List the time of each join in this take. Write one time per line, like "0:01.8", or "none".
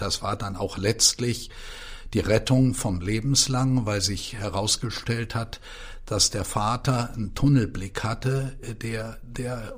none